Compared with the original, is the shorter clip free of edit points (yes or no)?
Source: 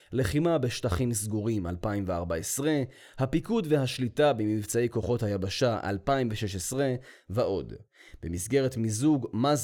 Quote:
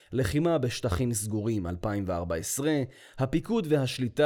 yes